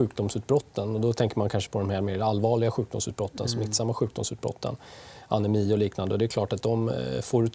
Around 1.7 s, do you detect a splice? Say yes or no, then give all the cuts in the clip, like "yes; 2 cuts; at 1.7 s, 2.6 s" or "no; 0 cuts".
yes; 1 cut; at 1.7 s